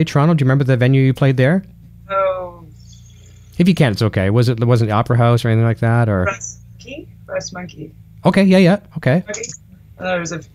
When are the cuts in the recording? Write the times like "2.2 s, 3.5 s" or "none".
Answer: none

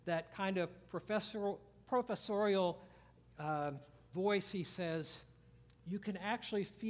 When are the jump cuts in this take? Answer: 4.1 s

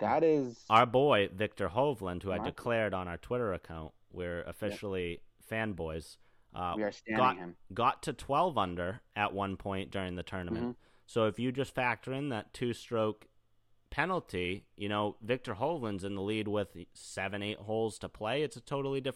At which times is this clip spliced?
none

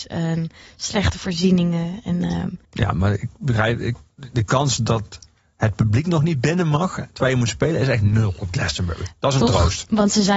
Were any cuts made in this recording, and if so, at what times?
2.6 s

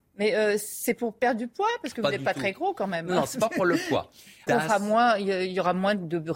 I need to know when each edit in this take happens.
4.5 s

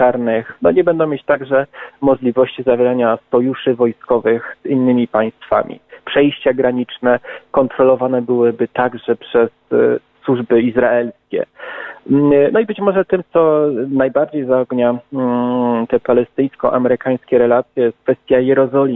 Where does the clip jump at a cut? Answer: 6.0 s

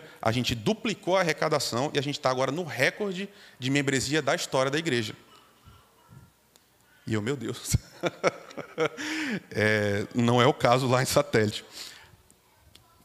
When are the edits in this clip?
none

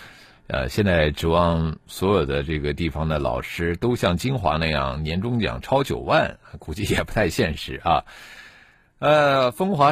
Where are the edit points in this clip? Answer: none

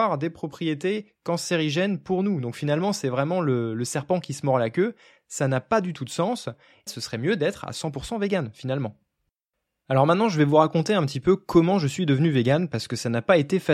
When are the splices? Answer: 6.9 s

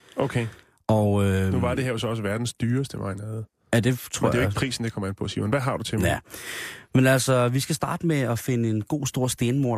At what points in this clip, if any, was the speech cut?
none

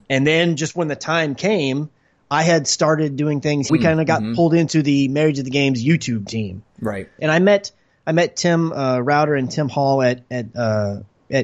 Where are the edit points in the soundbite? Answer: 3.7 s, 7.2 s

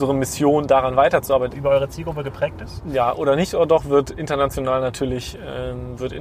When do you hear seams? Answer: 1.5 s

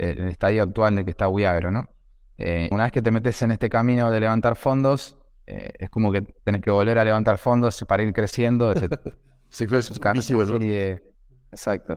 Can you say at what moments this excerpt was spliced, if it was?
2.7 s, 8.7 s

